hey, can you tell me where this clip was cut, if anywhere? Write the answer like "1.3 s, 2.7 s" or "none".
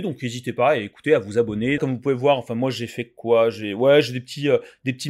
1.8 s